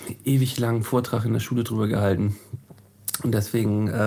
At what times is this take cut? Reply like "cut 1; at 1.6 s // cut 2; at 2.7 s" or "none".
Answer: none